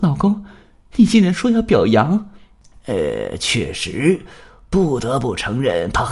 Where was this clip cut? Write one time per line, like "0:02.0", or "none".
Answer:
0:02.7